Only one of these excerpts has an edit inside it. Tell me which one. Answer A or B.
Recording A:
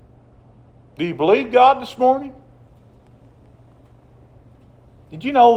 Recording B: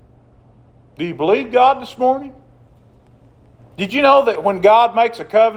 B